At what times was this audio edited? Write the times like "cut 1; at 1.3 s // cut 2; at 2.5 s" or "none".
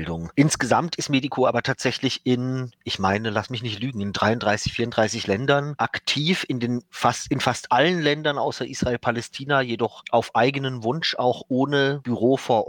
none